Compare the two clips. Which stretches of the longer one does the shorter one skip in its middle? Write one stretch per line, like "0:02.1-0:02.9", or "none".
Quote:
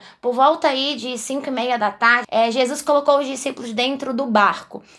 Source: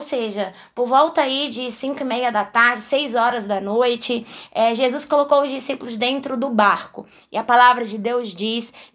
0:02.8-0:04.5